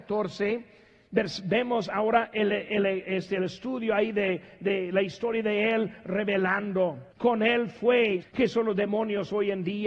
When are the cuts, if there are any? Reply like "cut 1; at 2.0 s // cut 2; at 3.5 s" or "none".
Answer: cut 1; at 7.1 s // cut 2; at 8.2 s